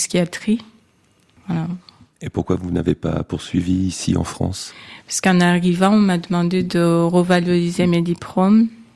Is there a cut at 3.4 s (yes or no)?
no